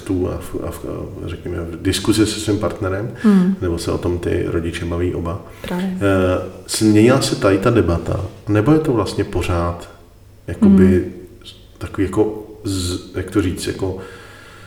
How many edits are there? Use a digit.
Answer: 0